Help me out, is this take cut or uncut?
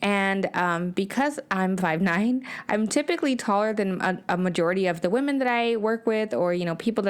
uncut